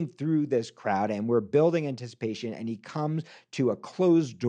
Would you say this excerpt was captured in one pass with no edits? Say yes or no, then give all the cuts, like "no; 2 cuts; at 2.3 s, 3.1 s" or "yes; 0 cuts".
yes; 0 cuts